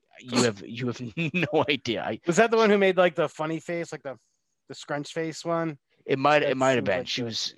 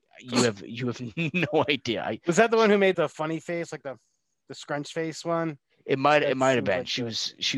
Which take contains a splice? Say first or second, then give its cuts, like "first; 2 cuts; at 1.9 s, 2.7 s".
second; 1 cut; at 2.9 s